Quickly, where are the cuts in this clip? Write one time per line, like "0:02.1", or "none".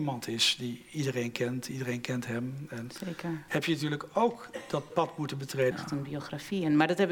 0:03.5
0:05.7